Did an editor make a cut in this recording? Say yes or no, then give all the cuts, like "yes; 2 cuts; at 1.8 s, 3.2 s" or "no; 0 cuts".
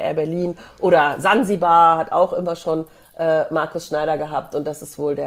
no; 0 cuts